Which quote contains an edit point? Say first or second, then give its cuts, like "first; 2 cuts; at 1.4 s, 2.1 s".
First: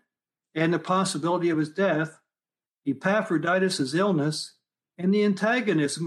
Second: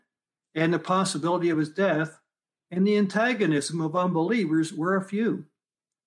second; 1 cut; at 2.6 s